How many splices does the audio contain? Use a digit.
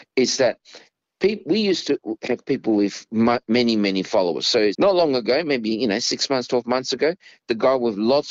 1